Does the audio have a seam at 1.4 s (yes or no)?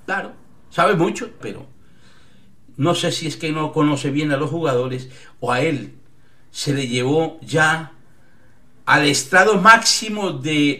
yes